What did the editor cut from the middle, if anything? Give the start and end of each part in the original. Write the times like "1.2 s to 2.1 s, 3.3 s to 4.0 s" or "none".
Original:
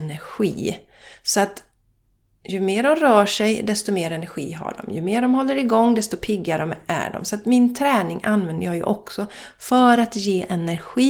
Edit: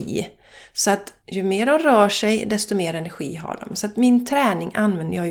1.7 s to 2.4 s, 4.9 s to 7.2 s